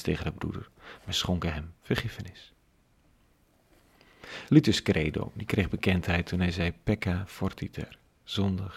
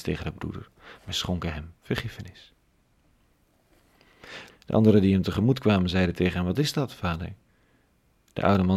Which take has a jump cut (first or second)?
second